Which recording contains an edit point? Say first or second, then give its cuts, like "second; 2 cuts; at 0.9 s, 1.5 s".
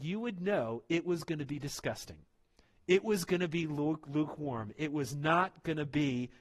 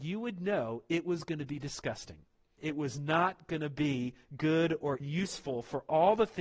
second; 2 cuts; at 2.6 s, 5.0 s